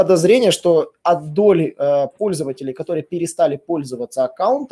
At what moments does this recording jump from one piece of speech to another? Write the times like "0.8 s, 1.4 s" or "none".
none